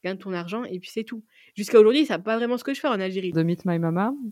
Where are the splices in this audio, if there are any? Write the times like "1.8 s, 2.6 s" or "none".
3.3 s